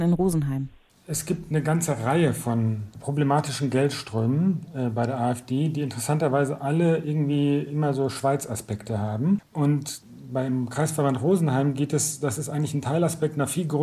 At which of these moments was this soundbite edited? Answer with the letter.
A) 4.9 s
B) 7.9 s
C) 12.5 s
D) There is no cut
D